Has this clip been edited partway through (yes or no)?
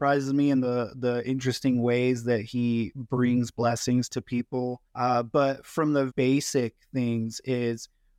yes